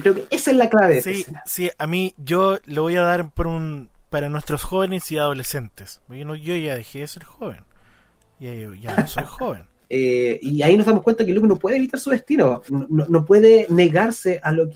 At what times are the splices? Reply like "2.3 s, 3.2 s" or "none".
9.8 s, 12.7 s